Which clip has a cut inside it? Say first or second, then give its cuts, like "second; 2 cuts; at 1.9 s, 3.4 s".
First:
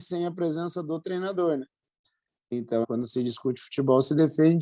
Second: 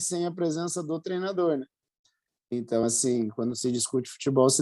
first; 1 cut; at 2.8 s